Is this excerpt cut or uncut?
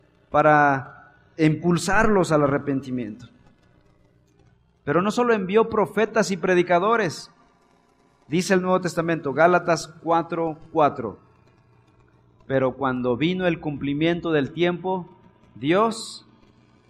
uncut